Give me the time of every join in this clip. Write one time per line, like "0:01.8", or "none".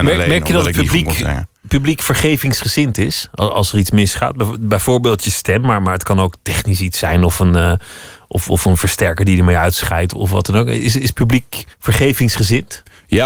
0:10.1
0:11.7